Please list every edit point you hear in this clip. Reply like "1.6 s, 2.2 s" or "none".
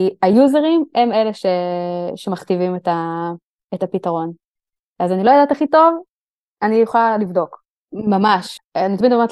7.8 s